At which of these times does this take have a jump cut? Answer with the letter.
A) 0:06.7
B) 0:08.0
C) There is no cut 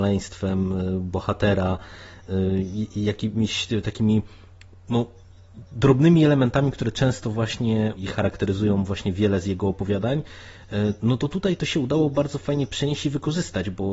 B